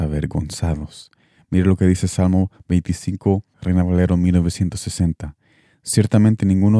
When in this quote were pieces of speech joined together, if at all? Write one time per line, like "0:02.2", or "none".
0:03.5

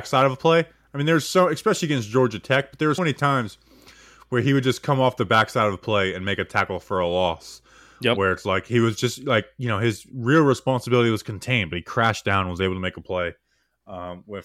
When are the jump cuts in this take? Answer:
0:03.0

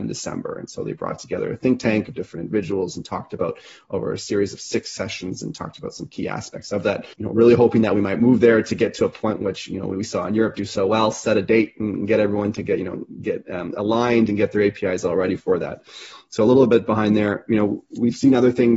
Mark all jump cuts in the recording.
0:07.1

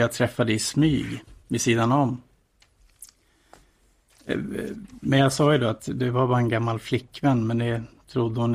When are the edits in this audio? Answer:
none

